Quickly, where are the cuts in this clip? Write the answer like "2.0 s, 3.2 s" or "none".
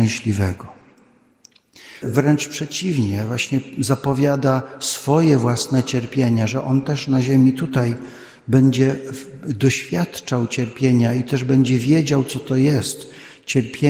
2.0 s